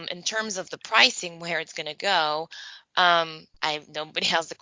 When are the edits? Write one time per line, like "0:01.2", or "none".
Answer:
0:03.5